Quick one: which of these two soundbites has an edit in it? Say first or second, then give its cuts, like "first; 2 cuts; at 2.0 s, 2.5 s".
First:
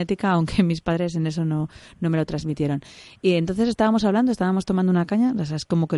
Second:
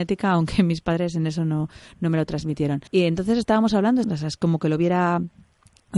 second; 2 cuts; at 2.9 s, 4.0 s